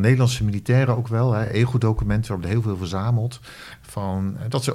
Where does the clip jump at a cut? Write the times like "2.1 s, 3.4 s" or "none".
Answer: none